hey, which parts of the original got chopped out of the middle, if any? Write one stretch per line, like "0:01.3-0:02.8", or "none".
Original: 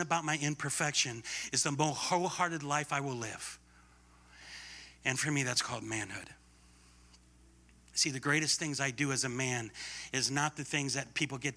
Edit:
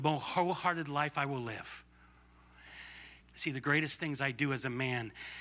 0:04.9-0:07.8